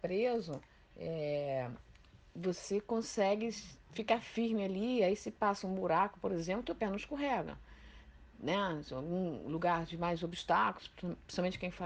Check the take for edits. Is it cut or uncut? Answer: uncut